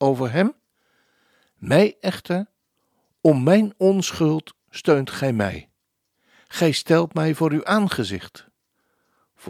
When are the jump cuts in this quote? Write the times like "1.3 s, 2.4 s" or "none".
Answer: none